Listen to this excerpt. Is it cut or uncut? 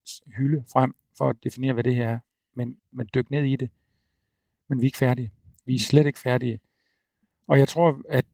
cut